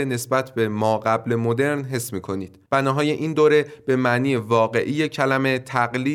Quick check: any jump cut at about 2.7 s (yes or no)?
yes